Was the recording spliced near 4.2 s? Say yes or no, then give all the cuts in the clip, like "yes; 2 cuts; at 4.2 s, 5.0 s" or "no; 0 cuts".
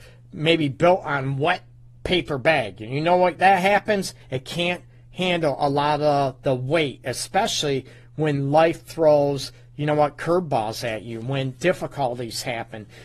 yes; 1 cut; at 4.2 s